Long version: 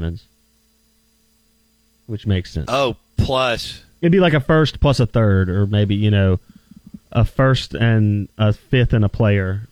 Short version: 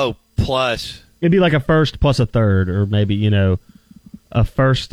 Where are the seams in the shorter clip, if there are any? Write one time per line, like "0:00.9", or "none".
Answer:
none

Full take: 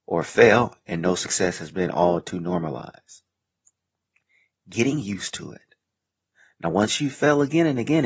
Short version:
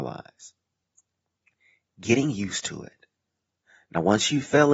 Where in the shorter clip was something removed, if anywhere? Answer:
none

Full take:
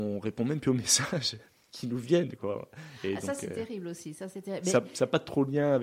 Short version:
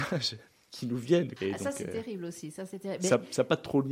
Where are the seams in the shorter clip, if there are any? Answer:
0:01.4

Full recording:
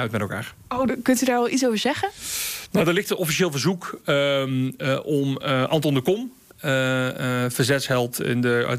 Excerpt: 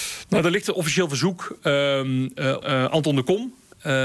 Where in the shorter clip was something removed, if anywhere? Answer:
0:02.6

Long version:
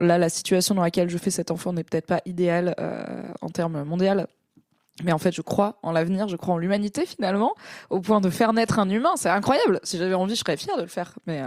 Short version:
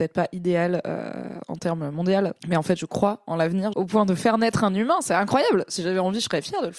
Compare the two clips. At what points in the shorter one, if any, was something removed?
0:02.4
0:03.7

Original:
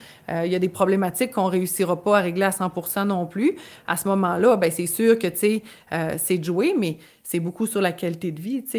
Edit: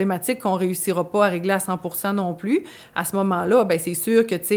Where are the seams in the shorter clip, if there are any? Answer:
none

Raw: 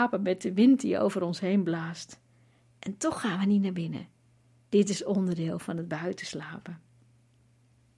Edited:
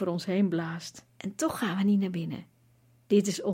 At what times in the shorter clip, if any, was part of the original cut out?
0:01.1

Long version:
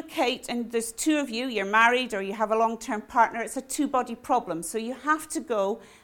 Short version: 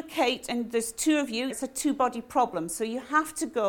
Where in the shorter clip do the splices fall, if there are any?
0:01.5

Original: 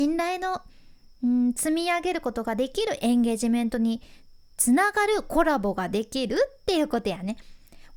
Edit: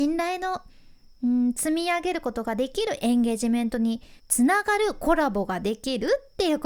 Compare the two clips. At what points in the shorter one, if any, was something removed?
0:04.2

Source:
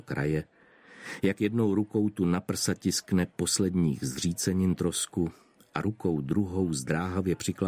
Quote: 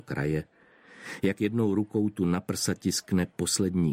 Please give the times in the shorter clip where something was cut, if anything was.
none

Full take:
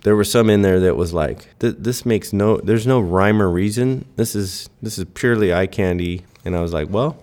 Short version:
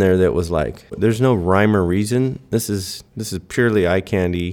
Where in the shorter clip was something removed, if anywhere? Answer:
0:00.9

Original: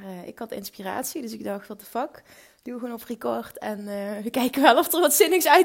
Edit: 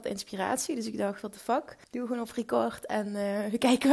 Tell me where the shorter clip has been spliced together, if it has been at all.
0:01.8

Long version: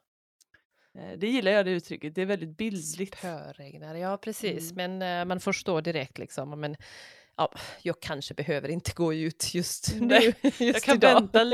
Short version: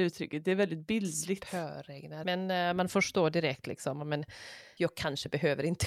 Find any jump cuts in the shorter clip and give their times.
0:02.2
0:04.8

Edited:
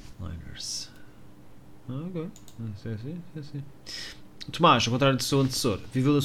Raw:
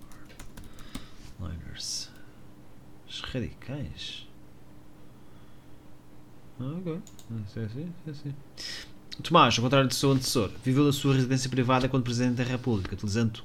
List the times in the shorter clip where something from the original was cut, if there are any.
0:01.8

